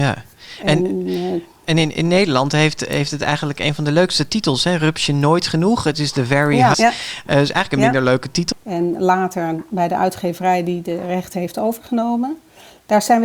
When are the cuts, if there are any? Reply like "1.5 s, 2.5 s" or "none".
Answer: 6.7 s, 8.5 s